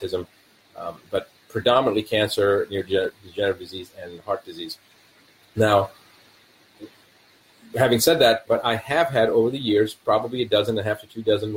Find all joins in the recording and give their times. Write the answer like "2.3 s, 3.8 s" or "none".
8.5 s